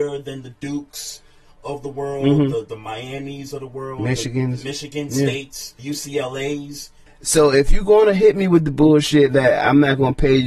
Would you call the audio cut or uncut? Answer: cut